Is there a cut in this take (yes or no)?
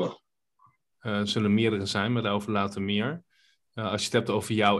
yes